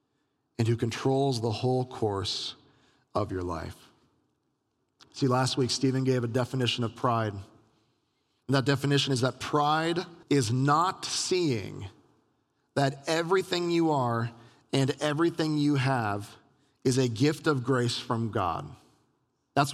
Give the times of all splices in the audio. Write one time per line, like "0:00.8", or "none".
0:10.2